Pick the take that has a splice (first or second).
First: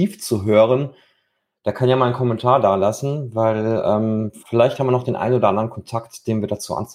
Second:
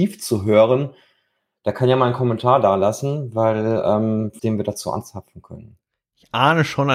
second